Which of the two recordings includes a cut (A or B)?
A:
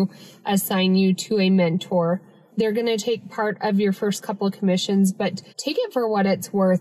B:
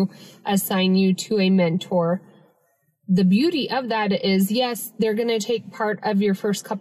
A